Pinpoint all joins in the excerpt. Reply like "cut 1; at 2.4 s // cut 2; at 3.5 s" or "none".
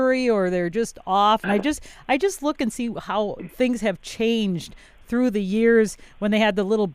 cut 1; at 1.4 s